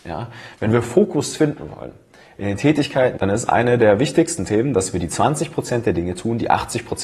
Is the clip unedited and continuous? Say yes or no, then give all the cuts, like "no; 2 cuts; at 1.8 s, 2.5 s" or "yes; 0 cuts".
no; 1 cut; at 3.2 s